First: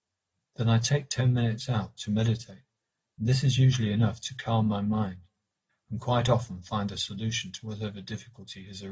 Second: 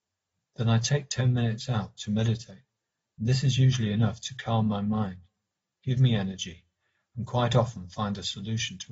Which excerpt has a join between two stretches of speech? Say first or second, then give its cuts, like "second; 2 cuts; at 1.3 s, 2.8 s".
first; 1 cut; at 5.7 s